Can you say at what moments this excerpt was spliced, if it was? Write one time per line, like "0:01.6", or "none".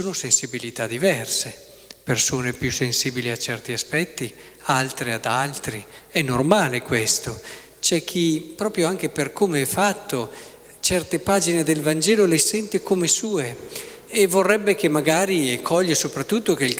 none